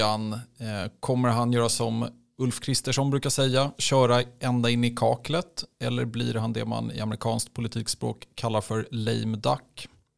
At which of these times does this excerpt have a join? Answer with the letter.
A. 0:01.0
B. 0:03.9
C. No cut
C